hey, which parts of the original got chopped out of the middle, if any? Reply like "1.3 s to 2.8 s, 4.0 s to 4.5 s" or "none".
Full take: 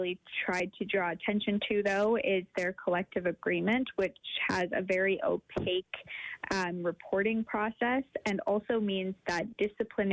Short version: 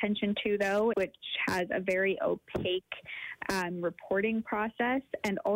2.2 s to 4.0 s